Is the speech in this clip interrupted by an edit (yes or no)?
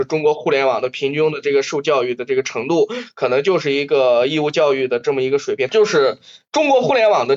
yes